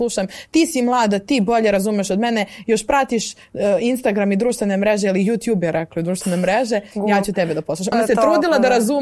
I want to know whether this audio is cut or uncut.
cut